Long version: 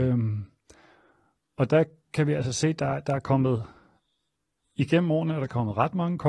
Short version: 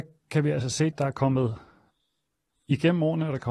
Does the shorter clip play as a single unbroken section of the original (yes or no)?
no